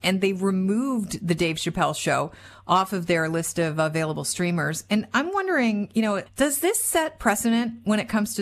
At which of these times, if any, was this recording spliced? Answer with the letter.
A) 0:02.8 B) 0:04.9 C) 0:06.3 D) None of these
C